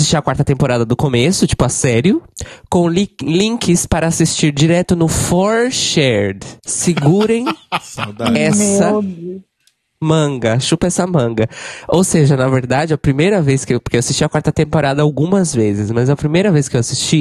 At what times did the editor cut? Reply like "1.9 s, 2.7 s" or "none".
6.6 s